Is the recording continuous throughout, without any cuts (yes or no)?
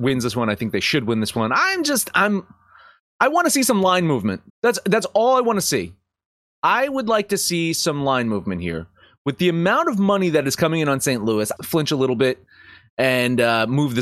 no